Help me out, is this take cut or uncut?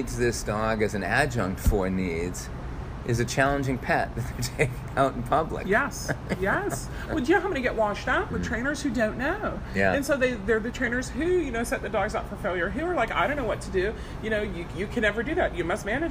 cut